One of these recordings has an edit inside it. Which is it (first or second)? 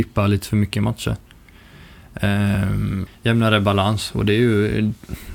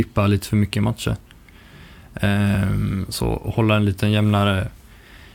first